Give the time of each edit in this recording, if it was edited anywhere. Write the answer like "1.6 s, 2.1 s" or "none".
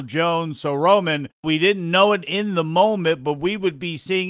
1.4 s